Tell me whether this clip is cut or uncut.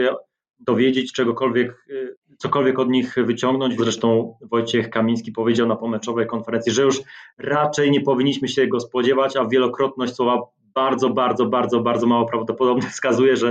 cut